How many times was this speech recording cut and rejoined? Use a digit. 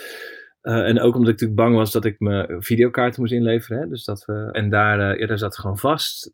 1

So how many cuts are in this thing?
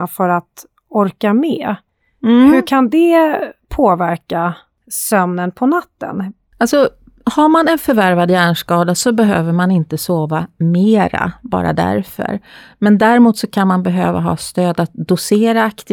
0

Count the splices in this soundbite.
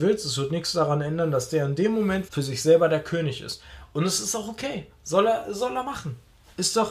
1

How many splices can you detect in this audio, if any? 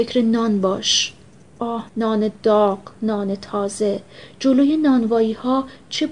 1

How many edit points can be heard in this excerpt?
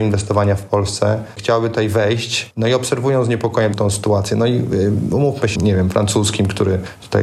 2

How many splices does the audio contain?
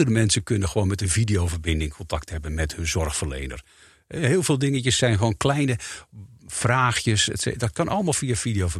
0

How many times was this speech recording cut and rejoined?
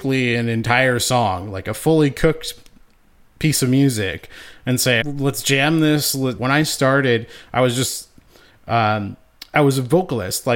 2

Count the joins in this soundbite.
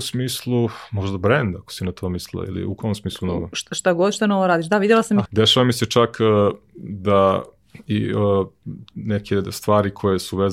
1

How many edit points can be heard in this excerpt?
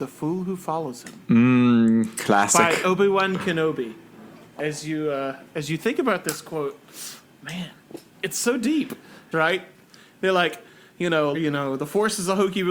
2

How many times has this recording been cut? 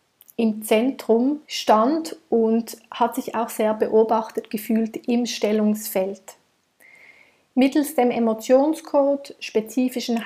1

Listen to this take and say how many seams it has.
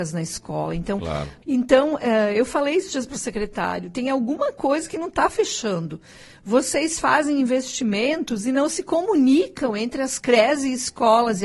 1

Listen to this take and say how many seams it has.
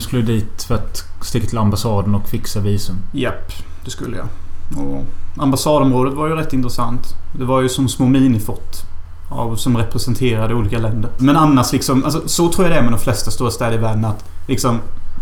1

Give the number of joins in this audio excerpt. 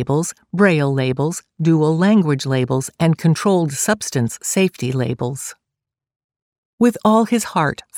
0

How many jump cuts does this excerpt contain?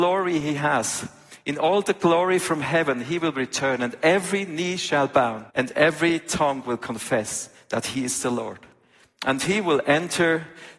1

